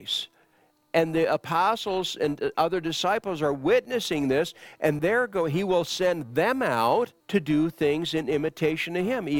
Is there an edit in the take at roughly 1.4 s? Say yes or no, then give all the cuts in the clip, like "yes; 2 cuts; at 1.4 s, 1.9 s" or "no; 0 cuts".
no; 2 cuts; at 5.0 s, 7.2 s